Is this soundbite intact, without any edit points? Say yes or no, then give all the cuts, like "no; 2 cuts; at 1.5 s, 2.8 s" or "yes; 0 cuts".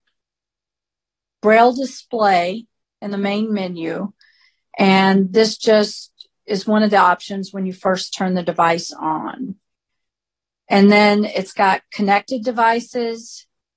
yes; 0 cuts